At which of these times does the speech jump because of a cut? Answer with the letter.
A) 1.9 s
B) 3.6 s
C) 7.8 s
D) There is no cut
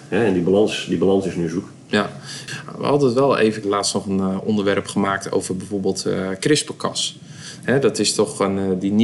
B